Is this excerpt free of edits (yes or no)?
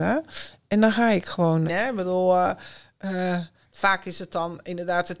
no